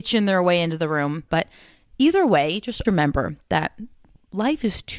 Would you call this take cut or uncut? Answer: cut